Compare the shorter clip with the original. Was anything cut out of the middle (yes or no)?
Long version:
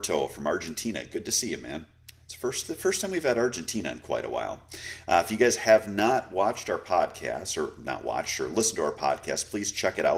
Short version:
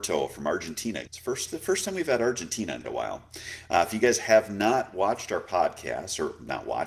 yes